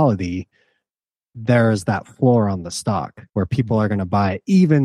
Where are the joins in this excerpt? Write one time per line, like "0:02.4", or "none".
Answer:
0:03.3